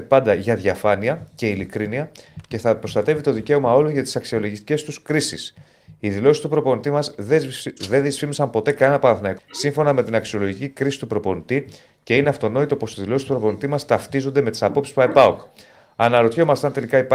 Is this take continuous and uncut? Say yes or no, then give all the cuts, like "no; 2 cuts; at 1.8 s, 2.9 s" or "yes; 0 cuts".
no; 1 cut; at 9.4 s